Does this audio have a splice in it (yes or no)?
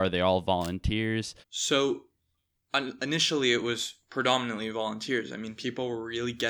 yes